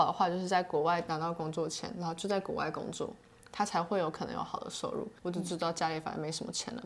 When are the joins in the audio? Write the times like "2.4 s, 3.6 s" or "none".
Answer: 5.2 s